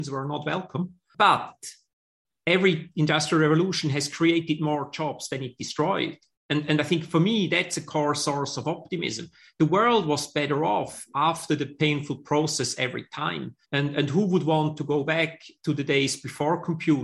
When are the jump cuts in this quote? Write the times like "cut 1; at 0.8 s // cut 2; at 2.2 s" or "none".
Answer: cut 1; at 13.6 s